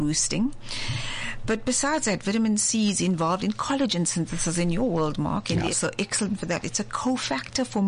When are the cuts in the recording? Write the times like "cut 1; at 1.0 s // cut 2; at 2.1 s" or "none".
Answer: cut 1; at 5.7 s